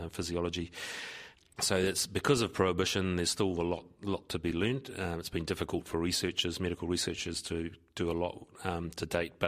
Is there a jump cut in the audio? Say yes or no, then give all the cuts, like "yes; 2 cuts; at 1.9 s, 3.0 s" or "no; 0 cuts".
no; 0 cuts